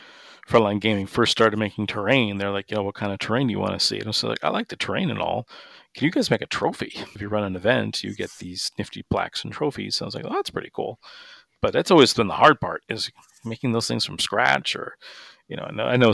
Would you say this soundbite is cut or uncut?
cut